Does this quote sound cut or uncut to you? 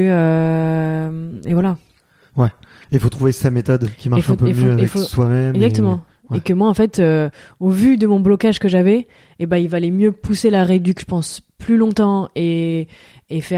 uncut